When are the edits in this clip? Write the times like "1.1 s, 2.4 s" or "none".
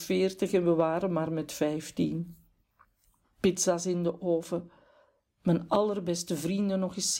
none